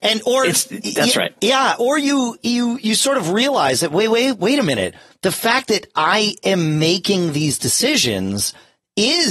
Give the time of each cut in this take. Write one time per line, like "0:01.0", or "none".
none